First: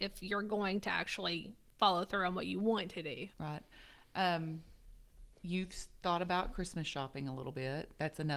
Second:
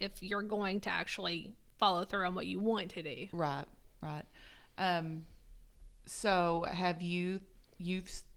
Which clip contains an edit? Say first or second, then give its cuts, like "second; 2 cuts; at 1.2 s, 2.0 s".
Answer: first; 2 cuts; at 3.3 s, 5.3 s